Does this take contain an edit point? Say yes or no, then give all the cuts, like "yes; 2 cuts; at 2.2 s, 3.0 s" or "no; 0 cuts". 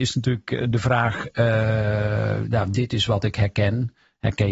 no; 0 cuts